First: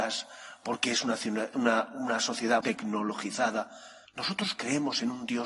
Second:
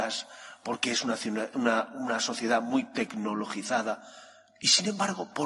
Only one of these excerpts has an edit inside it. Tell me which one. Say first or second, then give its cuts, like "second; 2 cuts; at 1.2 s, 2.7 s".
first; 2 cuts; at 2.6 s, 4.0 s